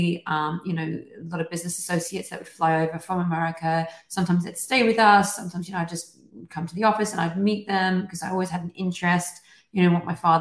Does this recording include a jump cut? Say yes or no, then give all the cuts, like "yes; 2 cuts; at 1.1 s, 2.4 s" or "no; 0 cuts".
no; 0 cuts